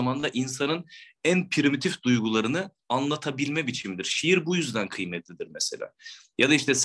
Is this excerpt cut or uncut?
uncut